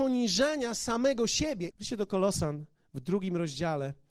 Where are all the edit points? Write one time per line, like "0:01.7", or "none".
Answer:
0:01.7